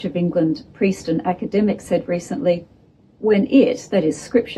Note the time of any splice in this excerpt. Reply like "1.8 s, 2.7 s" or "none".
none